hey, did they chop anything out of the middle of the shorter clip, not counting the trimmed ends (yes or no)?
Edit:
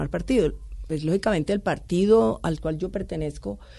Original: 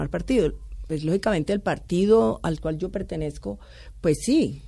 no